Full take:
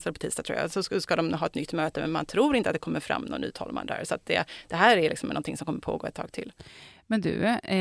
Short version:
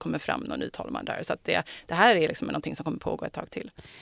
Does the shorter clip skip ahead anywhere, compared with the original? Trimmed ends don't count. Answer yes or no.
no